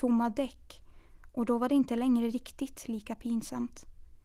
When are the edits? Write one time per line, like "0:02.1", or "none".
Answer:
none